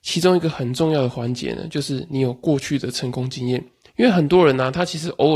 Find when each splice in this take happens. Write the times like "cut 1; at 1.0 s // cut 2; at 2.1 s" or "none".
cut 1; at 3.9 s